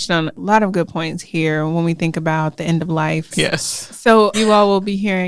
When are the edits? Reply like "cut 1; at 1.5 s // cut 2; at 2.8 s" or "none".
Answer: cut 1; at 3.3 s // cut 2; at 4.3 s